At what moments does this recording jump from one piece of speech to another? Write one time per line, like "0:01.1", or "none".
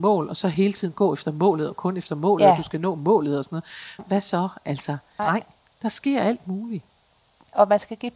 0:04.0
0:05.2